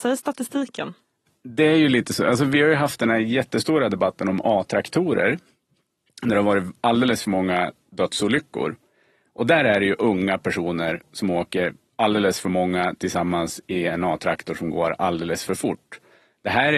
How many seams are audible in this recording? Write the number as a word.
zero